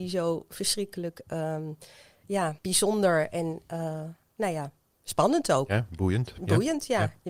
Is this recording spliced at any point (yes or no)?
yes